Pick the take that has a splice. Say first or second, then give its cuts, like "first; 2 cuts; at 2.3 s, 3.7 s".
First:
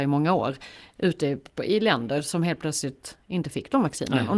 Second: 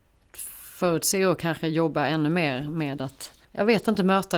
second; 1 cut; at 3.4 s